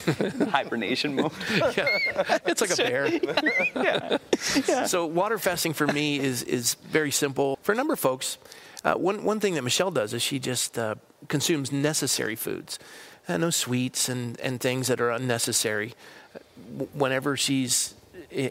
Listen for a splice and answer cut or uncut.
cut